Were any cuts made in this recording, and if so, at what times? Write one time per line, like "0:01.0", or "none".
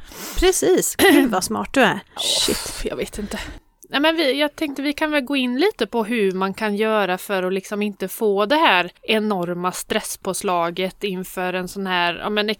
0:02.2
0:09.0